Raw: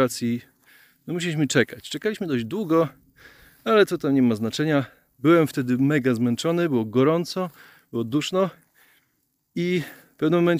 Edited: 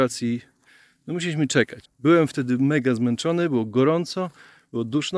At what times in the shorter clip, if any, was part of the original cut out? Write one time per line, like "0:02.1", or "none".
0:01.8